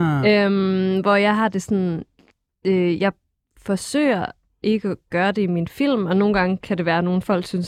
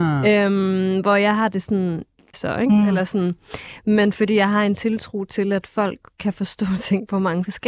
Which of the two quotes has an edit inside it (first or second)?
second